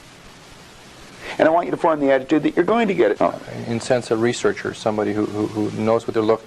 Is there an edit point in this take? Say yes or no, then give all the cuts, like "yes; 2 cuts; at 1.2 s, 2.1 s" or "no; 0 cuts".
yes; 1 cut; at 3.2 s